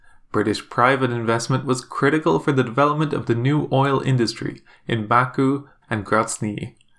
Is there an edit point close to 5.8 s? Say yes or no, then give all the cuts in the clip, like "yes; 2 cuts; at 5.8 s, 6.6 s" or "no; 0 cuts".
yes; 1 cut; at 5.8 s